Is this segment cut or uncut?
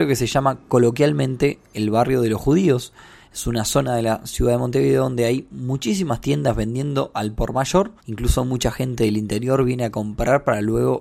cut